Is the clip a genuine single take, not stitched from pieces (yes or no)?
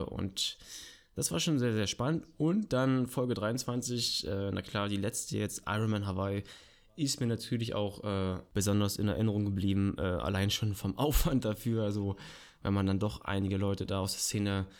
yes